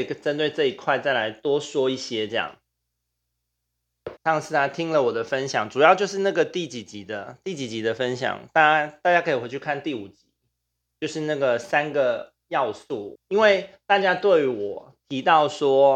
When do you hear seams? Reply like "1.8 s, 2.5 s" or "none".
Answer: 4.2 s, 13.2 s